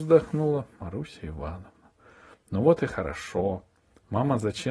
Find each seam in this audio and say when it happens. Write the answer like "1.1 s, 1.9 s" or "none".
none